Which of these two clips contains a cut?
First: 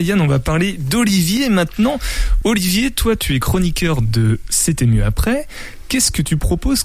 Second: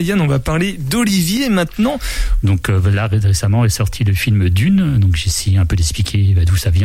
second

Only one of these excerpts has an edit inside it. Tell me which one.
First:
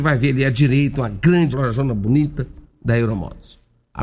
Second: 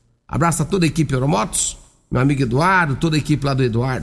first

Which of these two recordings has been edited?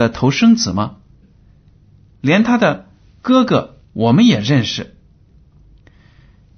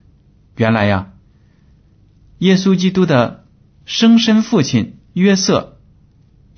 first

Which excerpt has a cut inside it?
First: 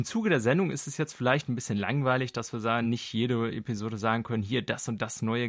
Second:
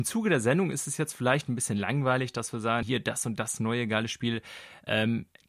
second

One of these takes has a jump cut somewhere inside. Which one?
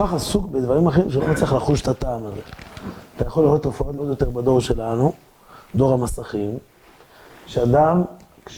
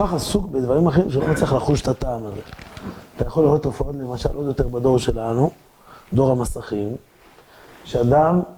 first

